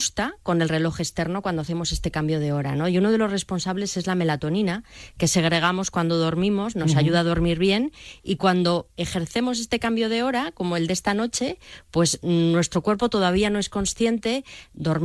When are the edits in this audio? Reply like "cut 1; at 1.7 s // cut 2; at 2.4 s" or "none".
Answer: none